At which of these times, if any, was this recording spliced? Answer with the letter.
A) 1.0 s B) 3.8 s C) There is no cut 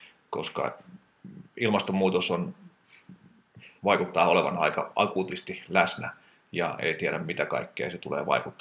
B